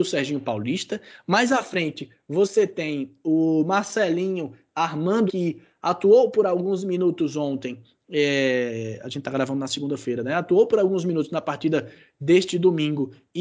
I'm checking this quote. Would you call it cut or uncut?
cut